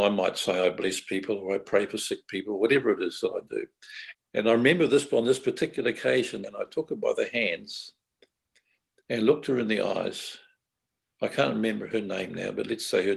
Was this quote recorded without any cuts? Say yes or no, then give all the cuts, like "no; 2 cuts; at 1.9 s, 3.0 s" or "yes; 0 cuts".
no; 2 cuts; at 4.1 s, 6.4 s